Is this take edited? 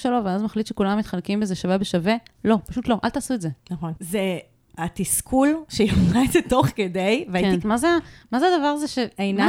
yes; 3 cuts; at 2.3 s, 4.0 s, 7.6 s

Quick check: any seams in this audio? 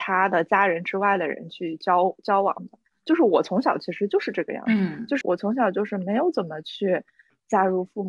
yes; 1 cut; at 5.2 s

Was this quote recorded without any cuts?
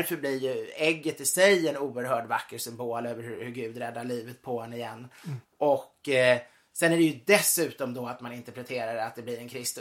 no; 1 cut; at 5.4 s

